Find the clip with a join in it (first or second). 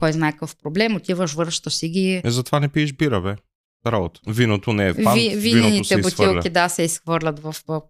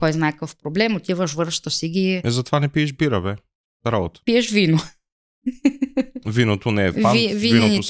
first